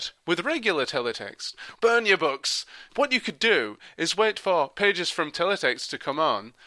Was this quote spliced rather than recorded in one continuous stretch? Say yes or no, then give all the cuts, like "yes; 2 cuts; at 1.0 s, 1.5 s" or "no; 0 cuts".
yes; 2 cuts; at 1.7 s, 2.9 s